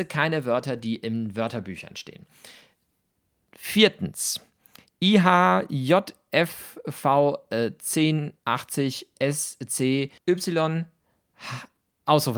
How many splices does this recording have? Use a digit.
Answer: 2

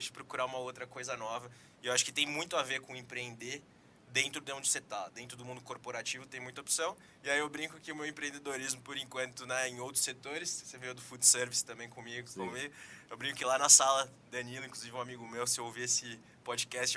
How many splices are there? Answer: 0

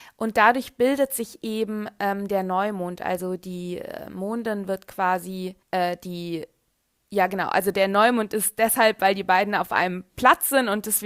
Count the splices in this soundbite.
1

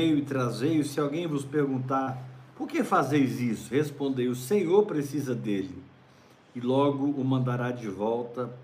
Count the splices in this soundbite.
0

